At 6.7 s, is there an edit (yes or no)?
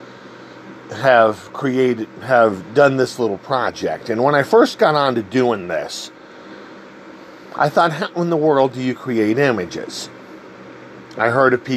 no